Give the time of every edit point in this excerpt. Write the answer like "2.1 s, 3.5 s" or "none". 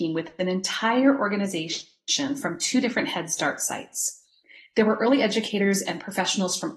none

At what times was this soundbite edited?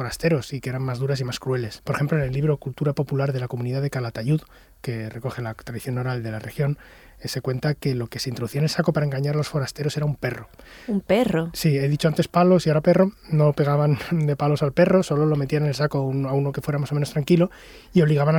1.8 s

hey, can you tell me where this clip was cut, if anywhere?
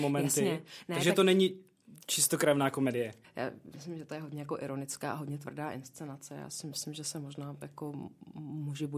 3.2 s

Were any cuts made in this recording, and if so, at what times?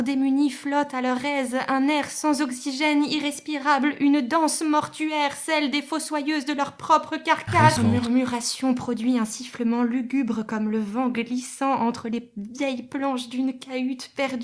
7.8 s

